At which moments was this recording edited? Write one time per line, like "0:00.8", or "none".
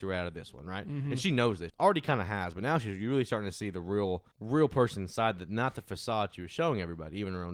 0:01.7
0:04.3